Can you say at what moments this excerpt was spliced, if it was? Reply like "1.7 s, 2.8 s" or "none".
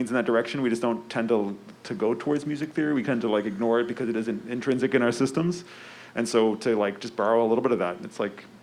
none